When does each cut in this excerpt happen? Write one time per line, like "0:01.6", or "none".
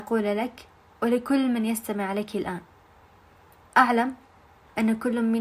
none